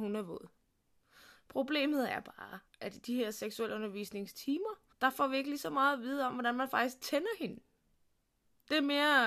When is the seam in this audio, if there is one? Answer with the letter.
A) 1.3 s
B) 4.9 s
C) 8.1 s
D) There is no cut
B